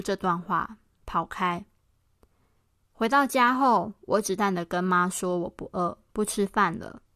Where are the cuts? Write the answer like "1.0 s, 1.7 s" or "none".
4.4 s